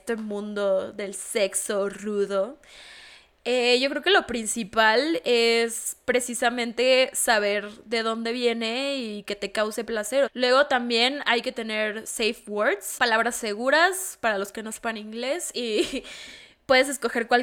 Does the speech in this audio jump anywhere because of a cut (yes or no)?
yes